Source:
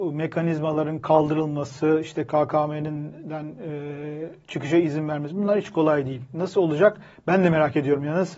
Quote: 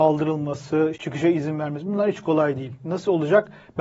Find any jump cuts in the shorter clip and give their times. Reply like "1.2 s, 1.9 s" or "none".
0.9 s